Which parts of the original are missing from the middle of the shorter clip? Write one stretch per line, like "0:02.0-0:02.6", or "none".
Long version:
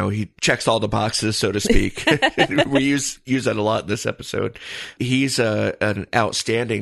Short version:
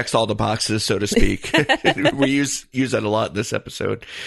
none